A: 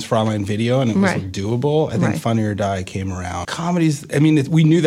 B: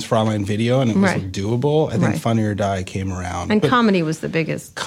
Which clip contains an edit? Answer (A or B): A